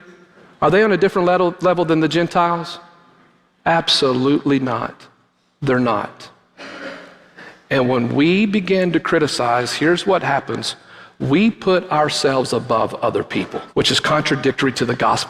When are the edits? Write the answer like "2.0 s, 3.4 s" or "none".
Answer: 13.7 s